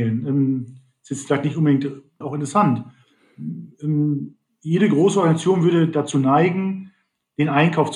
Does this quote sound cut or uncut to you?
cut